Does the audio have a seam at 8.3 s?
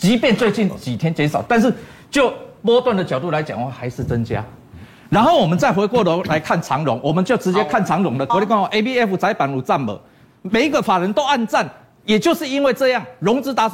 yes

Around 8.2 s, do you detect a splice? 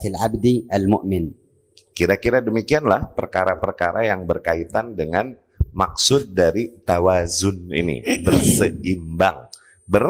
no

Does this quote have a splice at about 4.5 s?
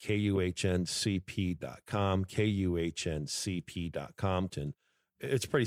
yes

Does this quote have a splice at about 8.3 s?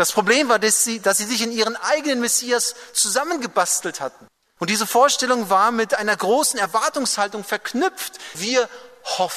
yes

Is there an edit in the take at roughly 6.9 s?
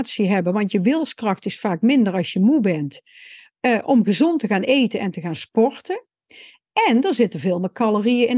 no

